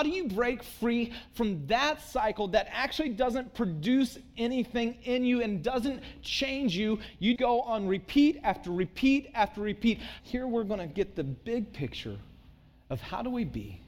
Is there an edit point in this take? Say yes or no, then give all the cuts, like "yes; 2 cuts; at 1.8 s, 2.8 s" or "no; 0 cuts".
yes; 2 cuts; at 7.4 s, 10.2 s